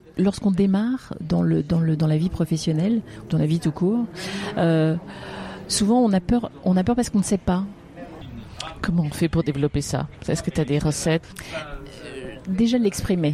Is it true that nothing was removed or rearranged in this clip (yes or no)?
no